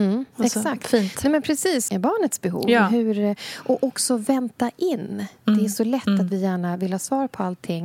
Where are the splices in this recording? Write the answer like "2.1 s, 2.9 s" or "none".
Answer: 1.9 s